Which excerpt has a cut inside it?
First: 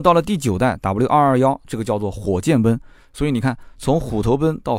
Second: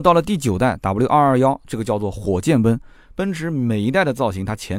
second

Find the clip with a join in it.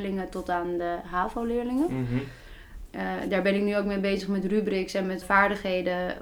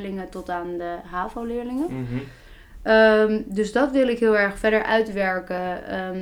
first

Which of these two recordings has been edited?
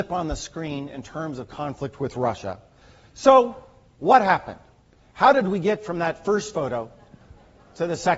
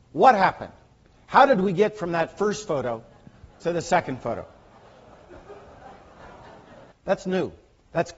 second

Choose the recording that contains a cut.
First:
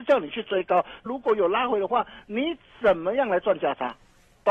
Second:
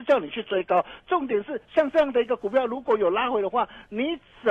first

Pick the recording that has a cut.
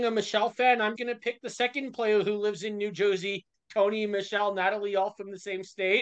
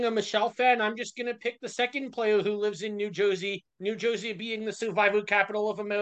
first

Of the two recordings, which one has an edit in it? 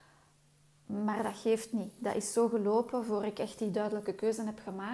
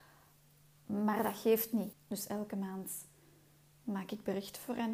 second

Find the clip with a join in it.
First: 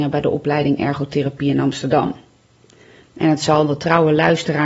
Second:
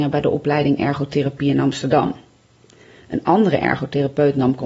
first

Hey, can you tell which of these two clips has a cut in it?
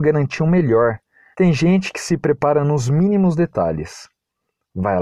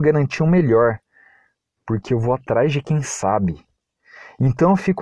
first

